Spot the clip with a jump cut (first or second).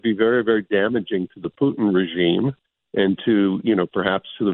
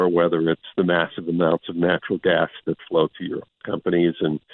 second